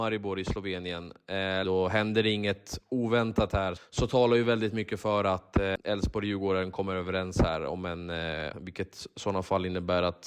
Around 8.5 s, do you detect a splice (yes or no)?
yes